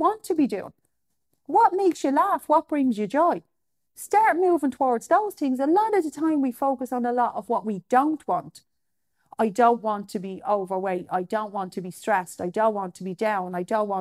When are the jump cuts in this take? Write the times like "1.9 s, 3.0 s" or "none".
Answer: none